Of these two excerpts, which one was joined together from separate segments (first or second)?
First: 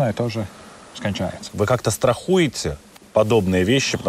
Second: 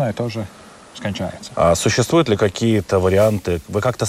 first